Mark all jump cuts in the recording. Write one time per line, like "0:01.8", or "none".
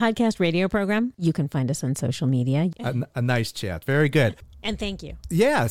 0:02.7